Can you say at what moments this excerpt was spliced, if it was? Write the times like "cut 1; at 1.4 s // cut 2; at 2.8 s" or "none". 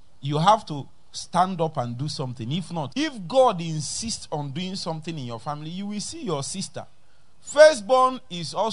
cut 1; at 2.9 s